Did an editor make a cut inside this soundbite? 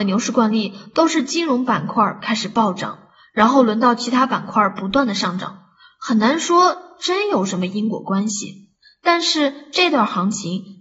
no; 0 cuts

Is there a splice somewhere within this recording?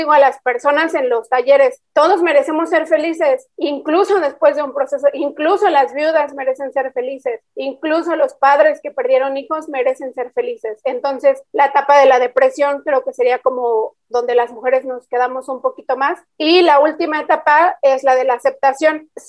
no; 0 cuts

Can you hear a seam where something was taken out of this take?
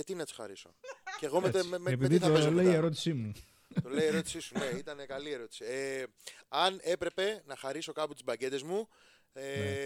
no; 0 cuts

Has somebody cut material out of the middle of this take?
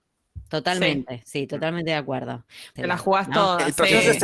yes; 1 cut; at 2.8 s

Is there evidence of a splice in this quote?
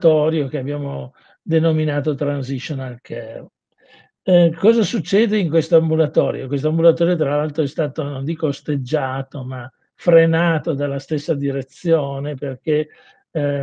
no; 0 cuts

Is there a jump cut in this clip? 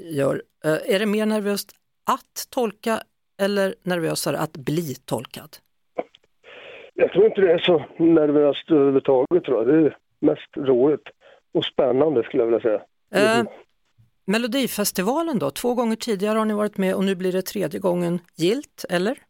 yes; 2 cuts; at 6.9 s, 13.1 s

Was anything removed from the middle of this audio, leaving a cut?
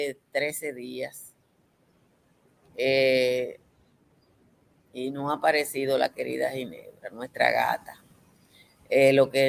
no; 0 cuts

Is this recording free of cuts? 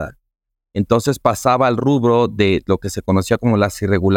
yes; 0 cuts

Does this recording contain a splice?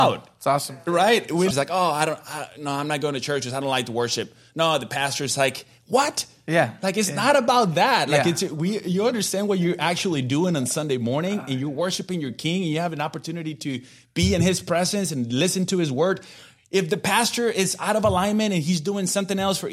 yes; 1 cut; at 1.5 s

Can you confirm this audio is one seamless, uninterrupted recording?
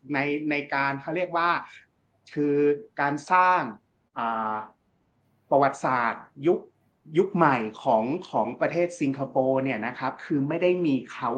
yes; 0 cuts

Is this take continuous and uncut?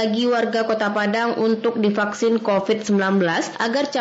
yes; 0 cuts

